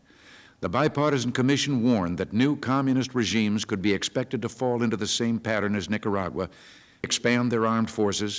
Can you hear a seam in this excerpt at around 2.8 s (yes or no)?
no